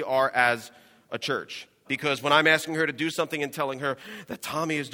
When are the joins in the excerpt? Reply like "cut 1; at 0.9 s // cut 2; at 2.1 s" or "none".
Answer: cut 1; at 1.8 s